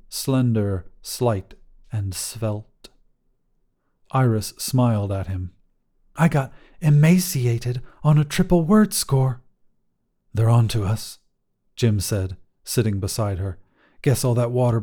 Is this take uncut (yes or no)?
yes